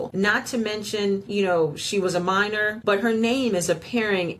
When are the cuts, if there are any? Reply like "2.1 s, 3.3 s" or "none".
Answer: 1.3 s, 2.8 s